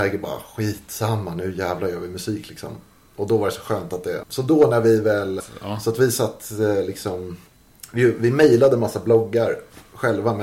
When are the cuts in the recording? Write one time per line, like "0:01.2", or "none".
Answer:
0:04.2
0:05.4